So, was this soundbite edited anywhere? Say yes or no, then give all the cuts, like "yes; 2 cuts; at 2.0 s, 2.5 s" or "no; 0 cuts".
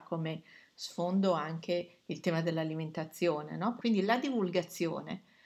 yes; 1 cut; at 3.8 s